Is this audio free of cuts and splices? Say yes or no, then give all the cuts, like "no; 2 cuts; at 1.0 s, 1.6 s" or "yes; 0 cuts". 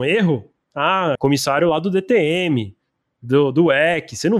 no; 1 cut; at 1.2 s